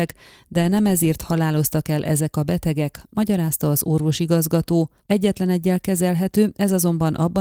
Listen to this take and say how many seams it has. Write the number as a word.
one